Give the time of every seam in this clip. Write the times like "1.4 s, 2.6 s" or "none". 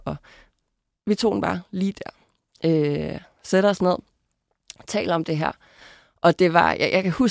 none